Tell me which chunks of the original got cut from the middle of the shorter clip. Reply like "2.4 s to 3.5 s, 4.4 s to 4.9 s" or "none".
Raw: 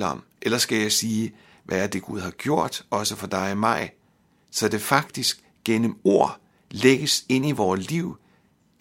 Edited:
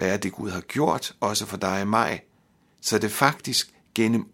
none

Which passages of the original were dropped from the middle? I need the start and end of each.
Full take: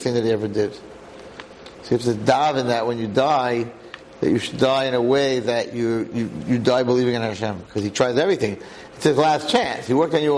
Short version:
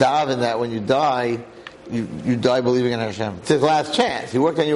4.1 s to 6.1 s, 7.6 s to 9.0 s

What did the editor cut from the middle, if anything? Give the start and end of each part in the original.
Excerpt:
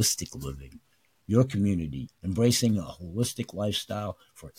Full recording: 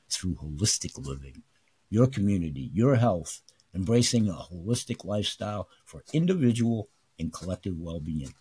2.7 s to 3.6 s

